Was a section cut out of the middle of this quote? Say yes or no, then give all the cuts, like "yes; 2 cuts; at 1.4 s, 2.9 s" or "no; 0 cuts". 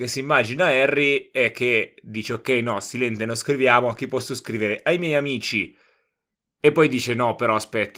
no; 0 cuts